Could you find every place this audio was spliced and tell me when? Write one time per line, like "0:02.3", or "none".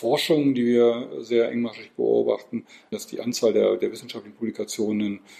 0:02.9